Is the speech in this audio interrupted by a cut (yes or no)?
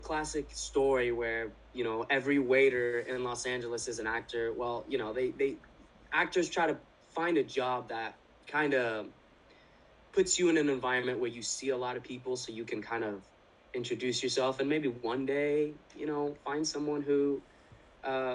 no